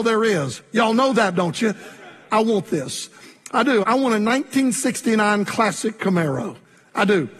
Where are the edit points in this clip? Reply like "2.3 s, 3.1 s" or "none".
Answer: 2.3 s, 3.8 s